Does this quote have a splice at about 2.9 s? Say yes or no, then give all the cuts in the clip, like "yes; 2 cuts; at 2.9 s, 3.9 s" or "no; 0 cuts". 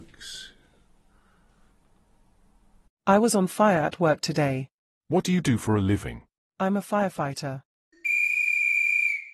no; 0 cuts